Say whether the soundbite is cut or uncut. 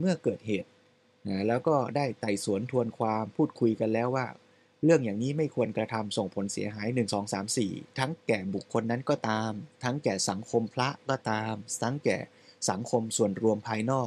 uncut